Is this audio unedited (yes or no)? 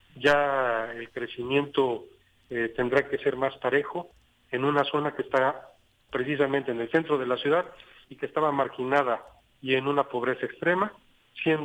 yes